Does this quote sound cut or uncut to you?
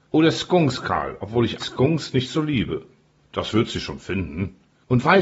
cut